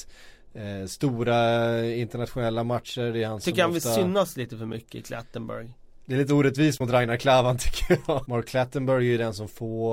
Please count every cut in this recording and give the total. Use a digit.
2